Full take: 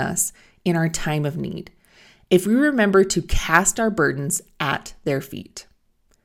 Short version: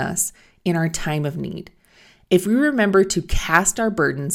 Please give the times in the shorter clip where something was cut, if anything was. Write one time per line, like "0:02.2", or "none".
none